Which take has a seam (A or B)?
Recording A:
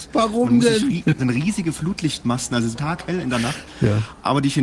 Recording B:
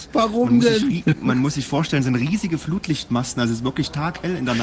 A